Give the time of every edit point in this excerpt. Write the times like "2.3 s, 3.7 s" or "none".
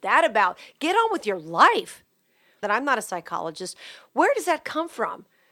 2.6 s